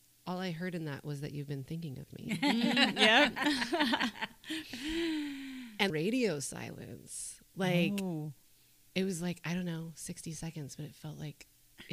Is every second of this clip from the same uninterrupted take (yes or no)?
no